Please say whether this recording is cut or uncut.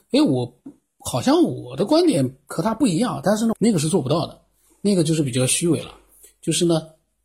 cut